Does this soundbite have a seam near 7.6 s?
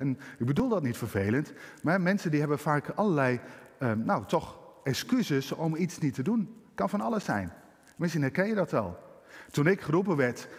no; 0 cuts

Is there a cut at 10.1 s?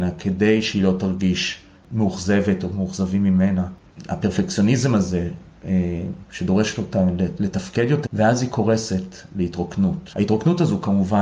yes; 2 cuts; at 8.1 s, 10.1 s

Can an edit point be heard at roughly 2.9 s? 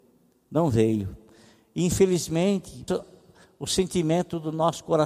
yes; 1 cut; at 2.9 s

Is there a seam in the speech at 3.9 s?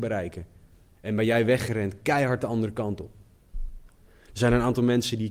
yes; 1 cut; at 3.9 s

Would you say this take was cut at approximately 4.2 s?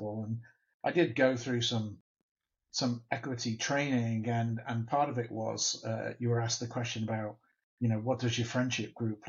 no; 0 cuts

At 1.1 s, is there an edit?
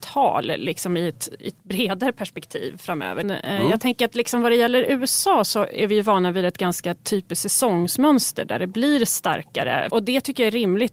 no; 2 cuts; at 3.2 s, 9.9 s

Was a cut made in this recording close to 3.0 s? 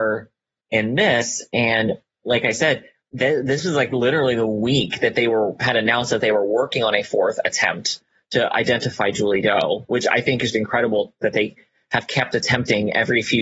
yes; 2 cuts; at 3.0 s, 10.5 s

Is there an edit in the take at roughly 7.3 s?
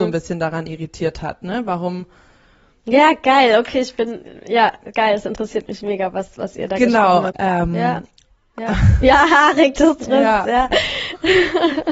yes; 1 cut; at 7.3 s

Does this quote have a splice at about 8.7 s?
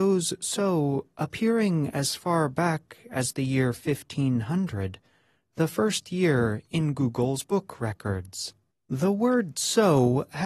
yes; 1 cut; at 8.7 s

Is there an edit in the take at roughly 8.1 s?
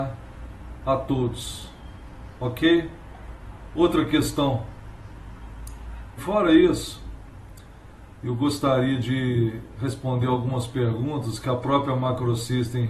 yes; 2 cuts; at 6.2 s, 8.1 s

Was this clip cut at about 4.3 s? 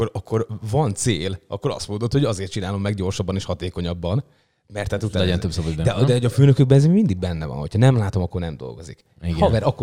no; 0 cuts

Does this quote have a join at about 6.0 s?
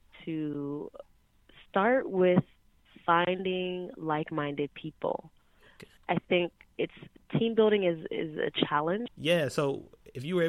yes; 2 cuts; at 6.0 s, 9.1 s

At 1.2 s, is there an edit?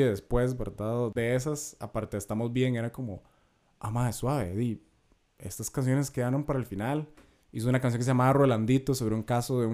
yes; 1 cut; at 1.2 s

